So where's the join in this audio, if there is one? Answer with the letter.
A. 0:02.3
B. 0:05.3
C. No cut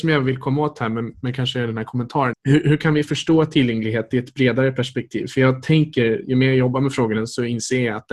A